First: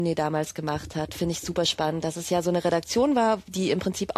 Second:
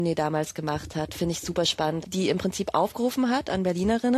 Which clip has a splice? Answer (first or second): second